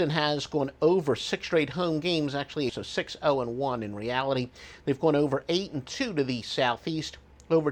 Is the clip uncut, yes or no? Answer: no